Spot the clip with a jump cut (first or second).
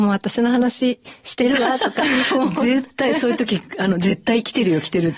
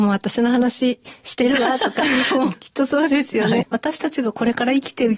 second